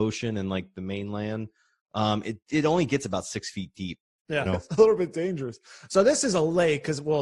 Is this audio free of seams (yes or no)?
no